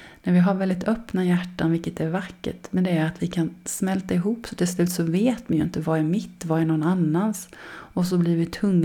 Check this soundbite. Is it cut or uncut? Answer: uncut